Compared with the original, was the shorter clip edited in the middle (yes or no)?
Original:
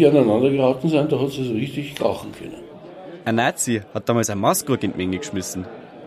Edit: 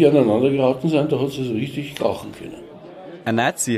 no